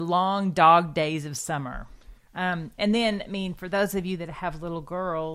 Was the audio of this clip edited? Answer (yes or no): yes